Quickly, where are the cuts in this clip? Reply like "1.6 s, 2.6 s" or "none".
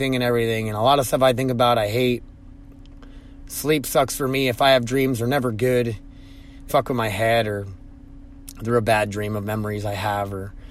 6.7 s